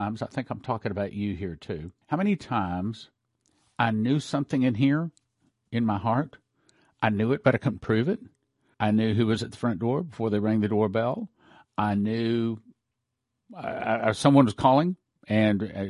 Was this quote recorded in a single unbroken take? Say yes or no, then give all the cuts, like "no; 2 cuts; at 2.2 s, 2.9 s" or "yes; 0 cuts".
no; 2 cuts; at 2.0 s, 8.7 s